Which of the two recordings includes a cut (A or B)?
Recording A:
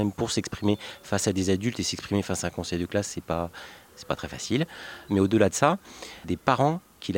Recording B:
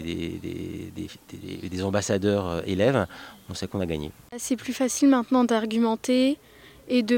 A